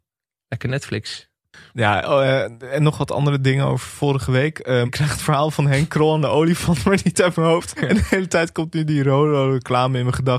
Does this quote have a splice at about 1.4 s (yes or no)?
no